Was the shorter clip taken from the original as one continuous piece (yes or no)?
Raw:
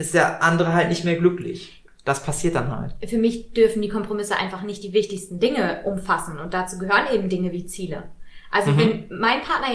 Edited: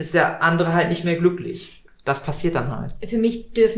yes